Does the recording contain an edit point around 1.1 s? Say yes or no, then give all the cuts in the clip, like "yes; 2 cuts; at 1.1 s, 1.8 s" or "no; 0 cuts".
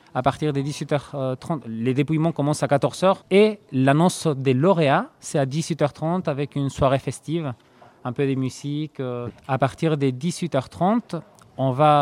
no; 2 cuts; at 3.2 s, 9.3 s